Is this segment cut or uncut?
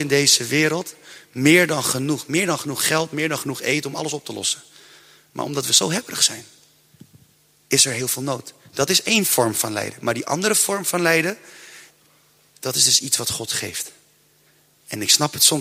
cut